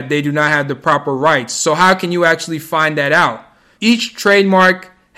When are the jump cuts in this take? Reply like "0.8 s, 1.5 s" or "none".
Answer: 3.8 s